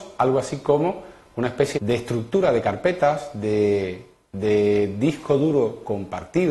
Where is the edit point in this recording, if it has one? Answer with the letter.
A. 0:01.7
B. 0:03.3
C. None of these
A